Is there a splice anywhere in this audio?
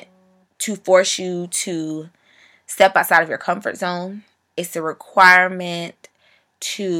no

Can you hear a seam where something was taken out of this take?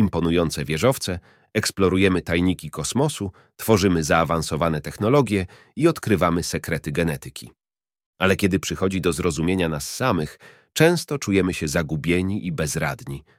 no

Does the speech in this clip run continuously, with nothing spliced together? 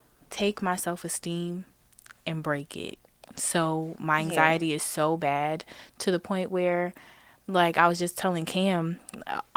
yes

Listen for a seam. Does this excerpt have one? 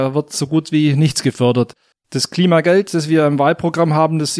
yes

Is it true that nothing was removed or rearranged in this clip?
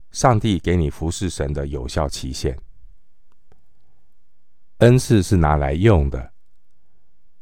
no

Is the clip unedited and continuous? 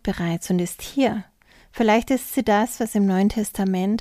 yes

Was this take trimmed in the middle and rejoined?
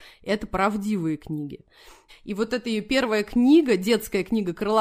yes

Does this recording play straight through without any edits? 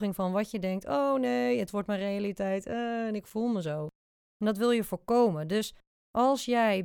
yes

